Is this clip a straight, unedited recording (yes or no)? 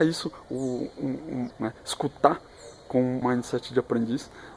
no